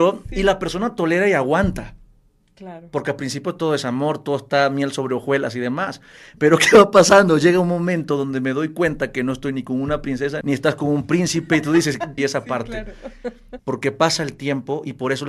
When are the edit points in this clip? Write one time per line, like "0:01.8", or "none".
0:10.4
0:12.2
0:13.6